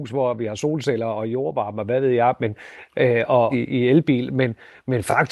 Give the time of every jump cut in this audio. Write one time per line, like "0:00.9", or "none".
0:03.5